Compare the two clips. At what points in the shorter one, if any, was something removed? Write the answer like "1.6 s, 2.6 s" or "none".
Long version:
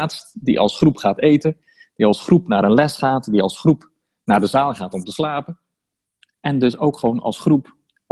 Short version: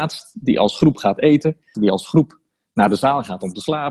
1.7 s